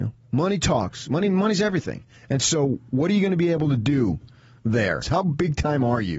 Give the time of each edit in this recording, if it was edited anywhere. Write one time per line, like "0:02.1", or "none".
0:05.0